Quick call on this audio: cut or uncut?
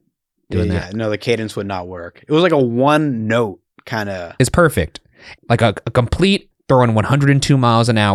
cut